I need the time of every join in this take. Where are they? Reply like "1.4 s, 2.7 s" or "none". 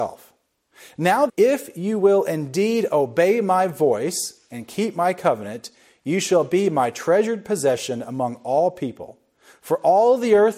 1.3 s